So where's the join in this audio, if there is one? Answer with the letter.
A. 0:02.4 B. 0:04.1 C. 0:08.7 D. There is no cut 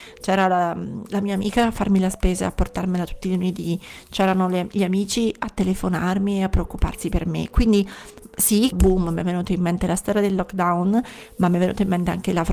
C